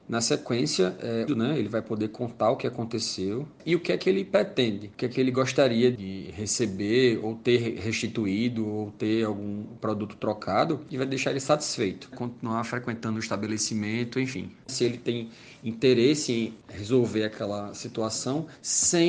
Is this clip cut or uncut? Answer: cut